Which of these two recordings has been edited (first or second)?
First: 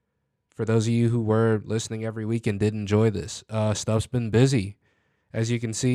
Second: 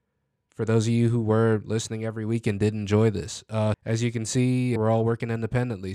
second